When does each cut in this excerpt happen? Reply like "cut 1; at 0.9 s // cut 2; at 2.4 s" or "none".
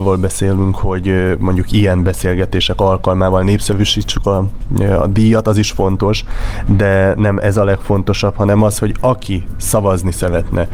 none